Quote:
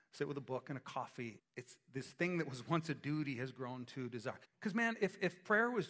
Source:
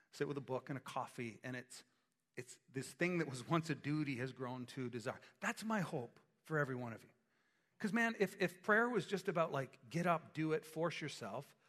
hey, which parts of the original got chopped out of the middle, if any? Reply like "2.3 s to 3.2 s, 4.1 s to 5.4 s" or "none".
1.4 s to 2.2 s, 5.2 s to 7.6 s